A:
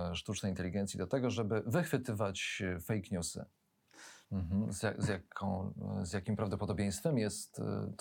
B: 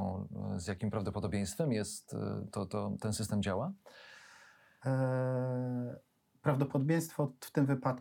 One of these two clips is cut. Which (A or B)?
A